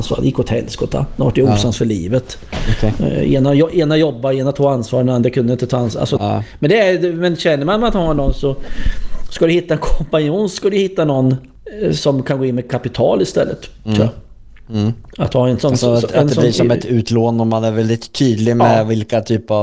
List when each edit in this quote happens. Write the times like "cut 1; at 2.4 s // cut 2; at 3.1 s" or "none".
cut 1; at 6.2 s